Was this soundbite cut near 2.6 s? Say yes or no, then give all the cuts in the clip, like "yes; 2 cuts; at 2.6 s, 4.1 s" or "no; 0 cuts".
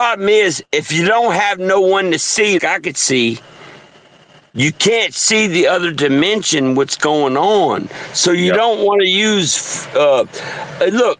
yes; 1 cut; at 2.6 s